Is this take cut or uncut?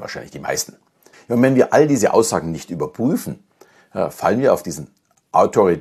cut